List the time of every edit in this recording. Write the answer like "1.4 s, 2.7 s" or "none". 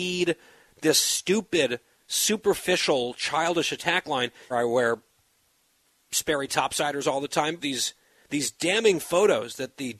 4.5 s, 7.6 s